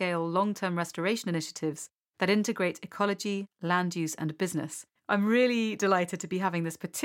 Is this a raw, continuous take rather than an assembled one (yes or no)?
no